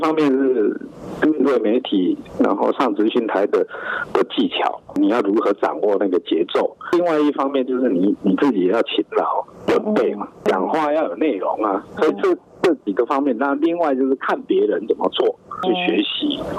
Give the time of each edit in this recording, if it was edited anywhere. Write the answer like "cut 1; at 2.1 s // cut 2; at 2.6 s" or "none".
none